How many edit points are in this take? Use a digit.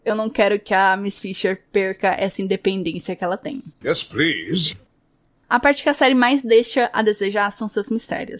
1